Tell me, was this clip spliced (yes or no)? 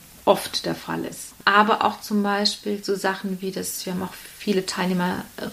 no